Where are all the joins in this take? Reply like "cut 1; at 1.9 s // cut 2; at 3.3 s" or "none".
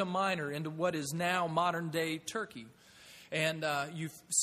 none